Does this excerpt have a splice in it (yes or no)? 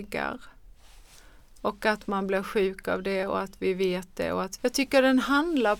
yes